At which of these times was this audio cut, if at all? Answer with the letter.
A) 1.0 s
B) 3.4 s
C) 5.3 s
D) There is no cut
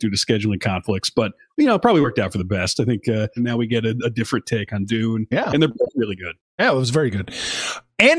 B